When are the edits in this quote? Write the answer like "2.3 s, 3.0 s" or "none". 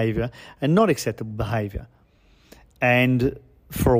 none